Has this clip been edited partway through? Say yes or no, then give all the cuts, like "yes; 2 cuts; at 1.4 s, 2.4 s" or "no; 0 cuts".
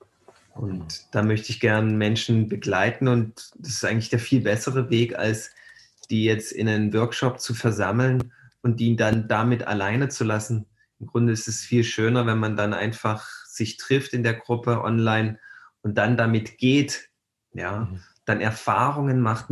no; 0 cuts